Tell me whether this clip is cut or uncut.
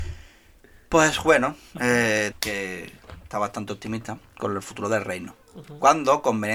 cut